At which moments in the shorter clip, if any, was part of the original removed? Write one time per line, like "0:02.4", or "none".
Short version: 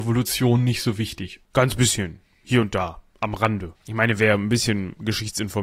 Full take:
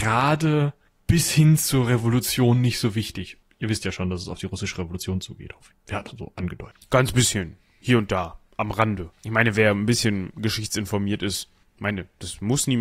0:01.5